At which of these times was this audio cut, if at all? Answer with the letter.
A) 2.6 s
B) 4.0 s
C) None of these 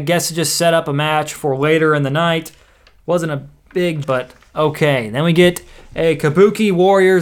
B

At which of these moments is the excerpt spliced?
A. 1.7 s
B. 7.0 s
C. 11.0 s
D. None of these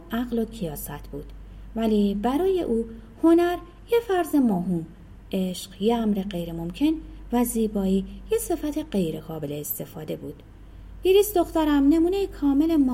D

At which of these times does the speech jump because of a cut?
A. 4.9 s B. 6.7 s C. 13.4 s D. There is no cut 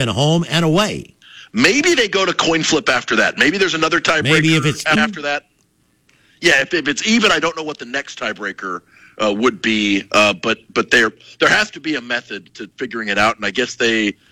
A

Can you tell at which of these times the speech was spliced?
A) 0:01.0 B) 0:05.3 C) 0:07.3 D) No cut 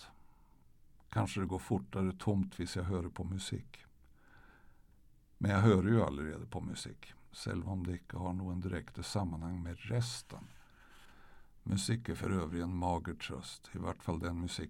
C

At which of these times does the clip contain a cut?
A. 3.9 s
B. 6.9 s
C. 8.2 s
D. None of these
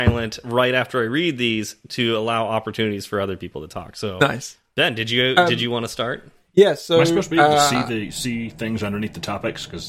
D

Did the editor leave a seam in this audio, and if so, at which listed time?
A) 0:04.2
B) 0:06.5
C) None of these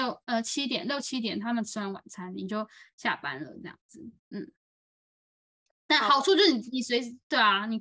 A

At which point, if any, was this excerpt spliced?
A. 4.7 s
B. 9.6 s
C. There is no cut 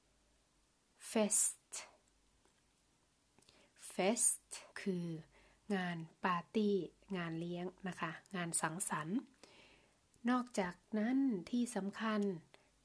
A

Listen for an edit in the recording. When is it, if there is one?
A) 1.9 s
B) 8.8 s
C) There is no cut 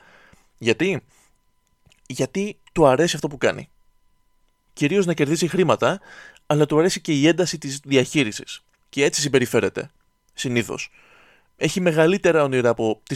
B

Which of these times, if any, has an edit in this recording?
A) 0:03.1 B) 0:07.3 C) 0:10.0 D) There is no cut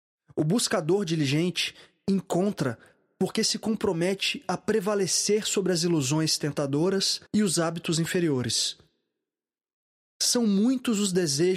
B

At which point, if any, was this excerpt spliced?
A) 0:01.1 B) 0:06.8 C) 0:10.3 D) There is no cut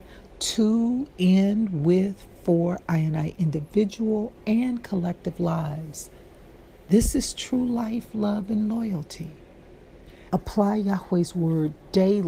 C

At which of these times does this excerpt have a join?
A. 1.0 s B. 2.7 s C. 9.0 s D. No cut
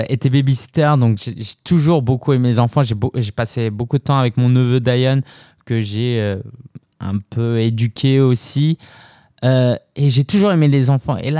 D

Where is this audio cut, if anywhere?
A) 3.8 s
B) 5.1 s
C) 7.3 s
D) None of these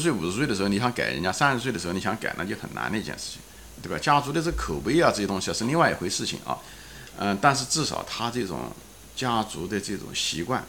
A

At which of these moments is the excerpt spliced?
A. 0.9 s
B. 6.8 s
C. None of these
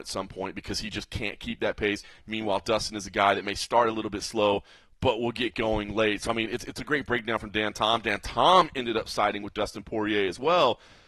B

